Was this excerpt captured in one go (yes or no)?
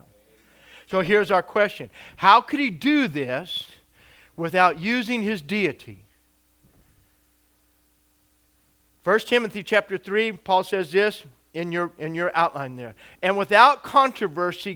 yes